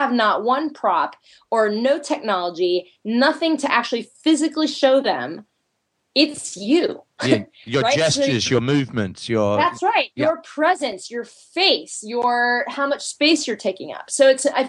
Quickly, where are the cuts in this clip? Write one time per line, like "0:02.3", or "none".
none